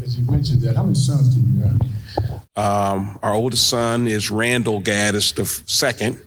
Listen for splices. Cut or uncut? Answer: cut